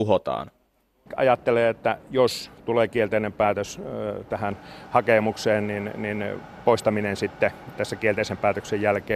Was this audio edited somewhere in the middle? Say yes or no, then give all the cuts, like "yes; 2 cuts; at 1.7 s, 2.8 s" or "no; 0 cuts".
no; 0 cuts